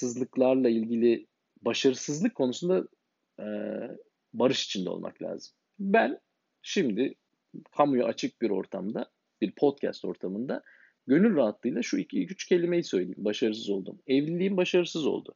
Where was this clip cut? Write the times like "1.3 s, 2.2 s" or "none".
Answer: 9.3 s